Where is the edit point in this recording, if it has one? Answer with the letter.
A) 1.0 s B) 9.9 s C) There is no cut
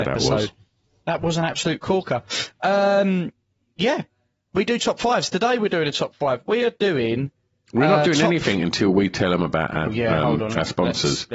B